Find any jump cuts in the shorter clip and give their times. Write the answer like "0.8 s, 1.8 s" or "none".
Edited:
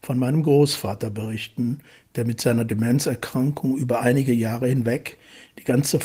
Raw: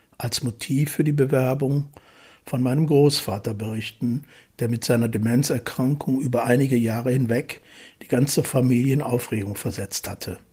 none